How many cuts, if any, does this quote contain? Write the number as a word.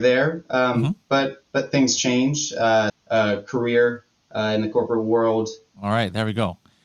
two